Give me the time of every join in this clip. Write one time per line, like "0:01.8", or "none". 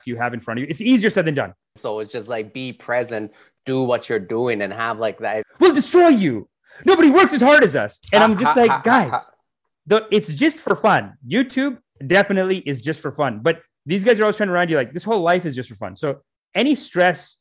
0:01.8
0:05.4